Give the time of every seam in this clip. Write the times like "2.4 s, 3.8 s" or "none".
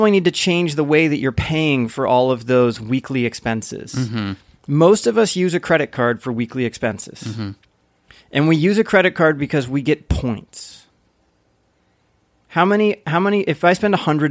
none